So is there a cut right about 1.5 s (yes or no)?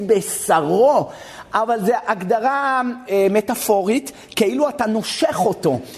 no